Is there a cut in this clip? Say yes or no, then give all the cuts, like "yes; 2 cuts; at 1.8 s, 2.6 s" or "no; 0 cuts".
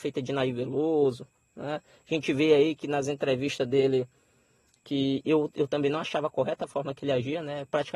no; 0 cuts